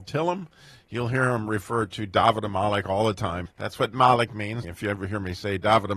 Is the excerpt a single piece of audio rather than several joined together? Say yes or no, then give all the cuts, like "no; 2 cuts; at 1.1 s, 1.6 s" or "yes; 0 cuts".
no; 2 cuts; at 3.5 s, 4.6 s